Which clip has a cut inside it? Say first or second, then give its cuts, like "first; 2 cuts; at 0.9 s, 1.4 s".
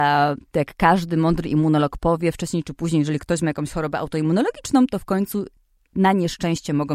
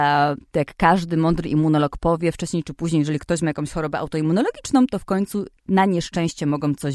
second; 1 cut; at 5.6 s